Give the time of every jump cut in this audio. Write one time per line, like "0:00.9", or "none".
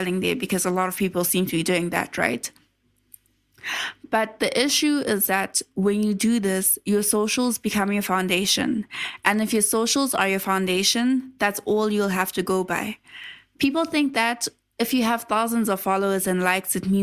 none